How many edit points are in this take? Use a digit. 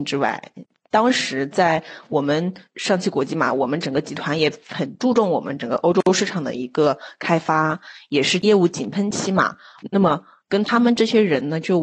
1